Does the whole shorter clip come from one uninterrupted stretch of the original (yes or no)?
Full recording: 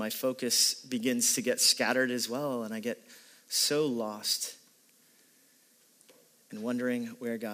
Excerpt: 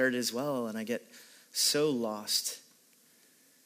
yes